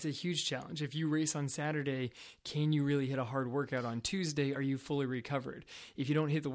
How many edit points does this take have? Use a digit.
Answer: 0